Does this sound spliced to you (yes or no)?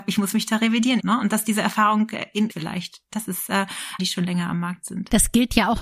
yes